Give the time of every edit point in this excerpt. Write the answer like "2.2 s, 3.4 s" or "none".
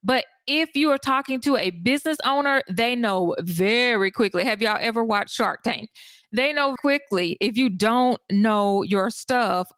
6.8 s